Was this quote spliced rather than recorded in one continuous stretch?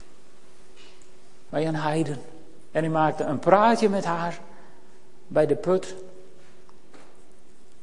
yes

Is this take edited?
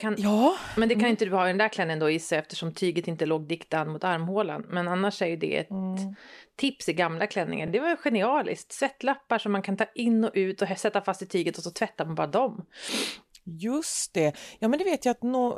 no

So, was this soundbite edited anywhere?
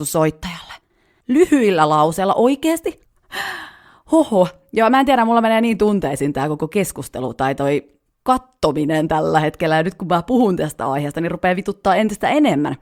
yes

